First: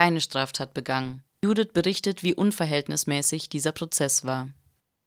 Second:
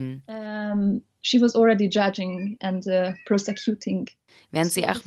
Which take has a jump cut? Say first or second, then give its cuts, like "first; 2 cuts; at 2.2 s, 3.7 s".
first; 1 cut; at 1.3 s